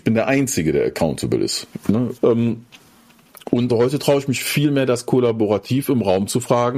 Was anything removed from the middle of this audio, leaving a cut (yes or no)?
yes